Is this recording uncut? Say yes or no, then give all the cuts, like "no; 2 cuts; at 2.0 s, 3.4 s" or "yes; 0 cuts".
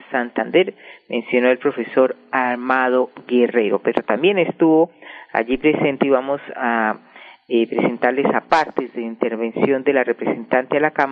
yes; 0 cuts